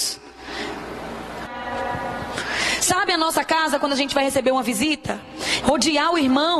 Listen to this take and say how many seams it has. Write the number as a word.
two